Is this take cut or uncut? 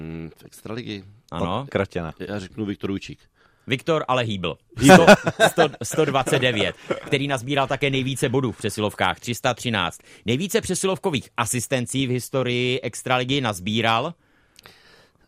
cut